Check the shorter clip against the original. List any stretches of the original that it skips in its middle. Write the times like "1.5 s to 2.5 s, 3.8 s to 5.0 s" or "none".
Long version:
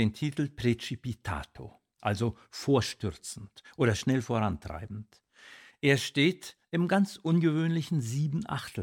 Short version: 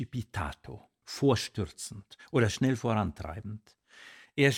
1.9 s to 2.5 s